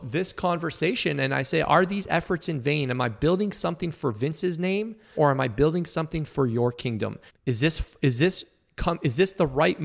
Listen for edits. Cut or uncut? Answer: cut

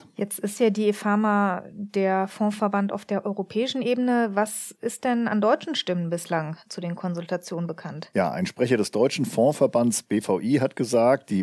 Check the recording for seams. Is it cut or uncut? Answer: uncut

